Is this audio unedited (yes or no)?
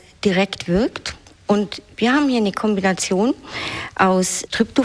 yes